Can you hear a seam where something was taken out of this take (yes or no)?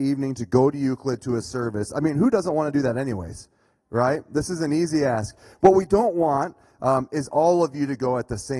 no